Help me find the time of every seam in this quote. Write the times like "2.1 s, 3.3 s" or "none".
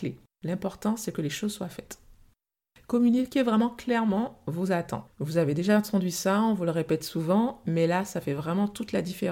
5.1 s